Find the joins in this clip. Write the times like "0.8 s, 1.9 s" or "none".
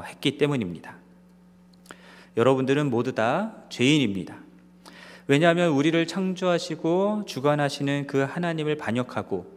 2.2 s